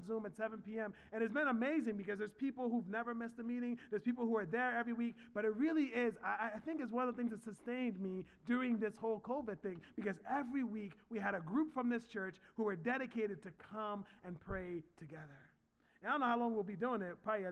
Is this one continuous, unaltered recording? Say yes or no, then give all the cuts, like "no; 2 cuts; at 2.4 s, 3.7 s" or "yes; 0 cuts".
yes; 0 cuts